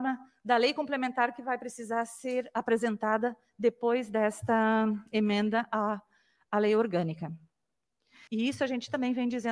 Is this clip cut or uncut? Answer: cut